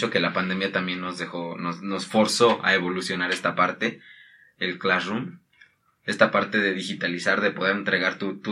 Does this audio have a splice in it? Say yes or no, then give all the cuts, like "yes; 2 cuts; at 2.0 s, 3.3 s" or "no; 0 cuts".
no; 0 cuts